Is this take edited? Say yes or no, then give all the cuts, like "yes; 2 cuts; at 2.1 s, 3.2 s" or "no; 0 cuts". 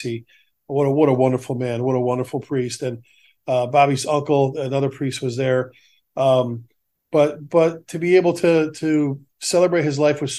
no; 0 cuts